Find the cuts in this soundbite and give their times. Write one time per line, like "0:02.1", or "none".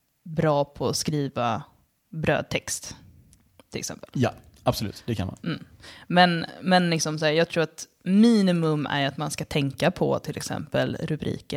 none